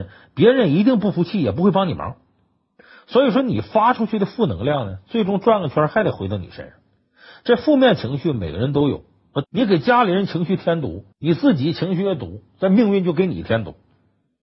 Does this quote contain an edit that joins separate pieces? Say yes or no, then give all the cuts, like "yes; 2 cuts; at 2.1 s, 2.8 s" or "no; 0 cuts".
yes; 2 cuts; at 9.4 s, 11.1 s